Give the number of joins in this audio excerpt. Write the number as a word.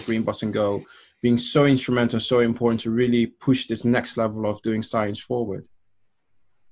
zero